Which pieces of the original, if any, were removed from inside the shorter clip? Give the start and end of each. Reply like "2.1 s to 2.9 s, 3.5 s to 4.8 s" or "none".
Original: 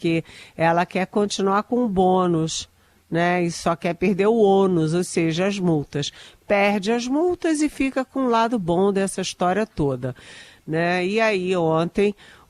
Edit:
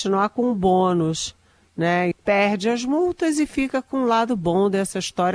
3.4 s to 6.3 s